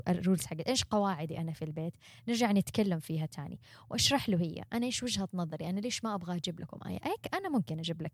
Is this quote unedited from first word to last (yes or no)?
yes